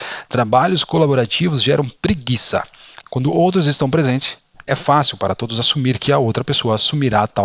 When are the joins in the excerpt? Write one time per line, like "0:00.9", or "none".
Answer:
0:03.0